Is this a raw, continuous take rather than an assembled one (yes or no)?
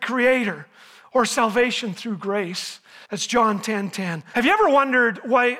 no